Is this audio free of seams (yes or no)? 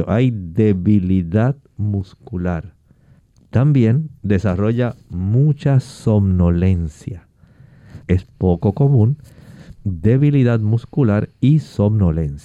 no